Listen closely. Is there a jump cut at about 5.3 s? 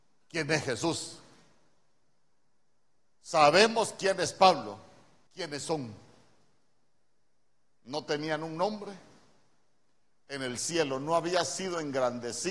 yes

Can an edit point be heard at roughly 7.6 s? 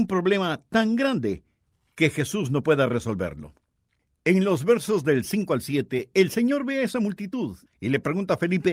yes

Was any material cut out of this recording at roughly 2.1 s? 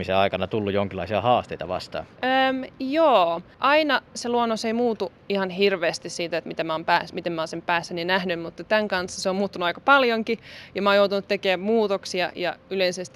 yes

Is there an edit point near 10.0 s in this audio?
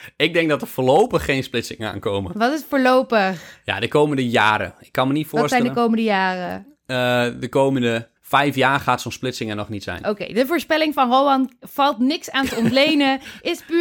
no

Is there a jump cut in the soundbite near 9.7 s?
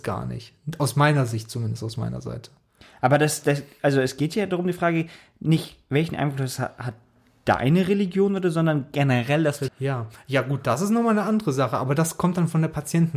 yes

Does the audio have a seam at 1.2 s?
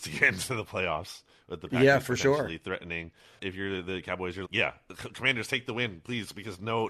no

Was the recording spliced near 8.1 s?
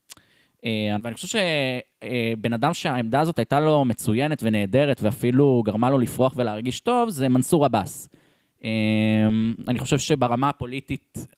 no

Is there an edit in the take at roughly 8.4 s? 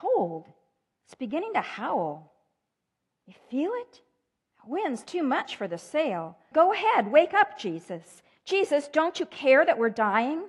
no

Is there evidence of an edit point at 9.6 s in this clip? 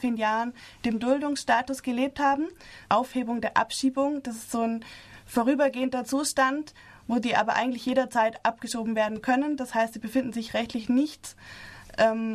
no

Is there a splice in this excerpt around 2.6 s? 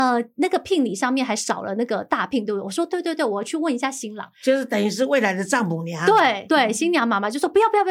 no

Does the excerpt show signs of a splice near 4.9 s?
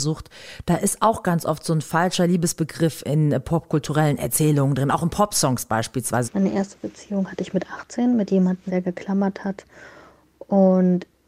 no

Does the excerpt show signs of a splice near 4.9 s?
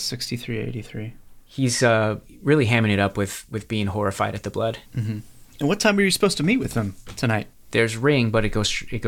yes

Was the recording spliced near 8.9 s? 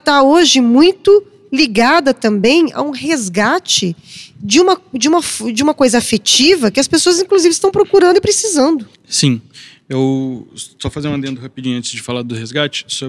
yes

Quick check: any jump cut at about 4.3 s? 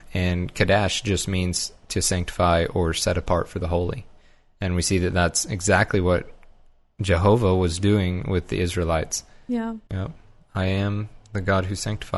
no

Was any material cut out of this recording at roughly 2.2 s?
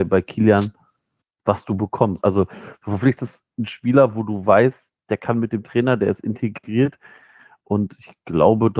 yes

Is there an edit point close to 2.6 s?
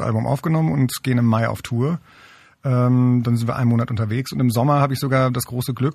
no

